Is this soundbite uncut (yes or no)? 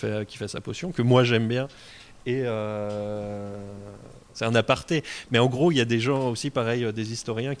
yes